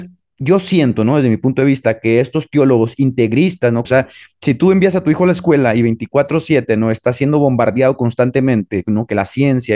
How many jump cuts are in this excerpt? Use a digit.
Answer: 1